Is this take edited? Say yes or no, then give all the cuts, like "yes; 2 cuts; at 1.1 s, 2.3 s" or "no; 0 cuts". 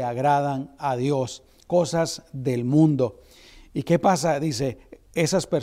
no; 0 cuts